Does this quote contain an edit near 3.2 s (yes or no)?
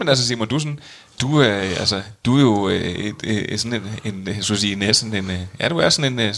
no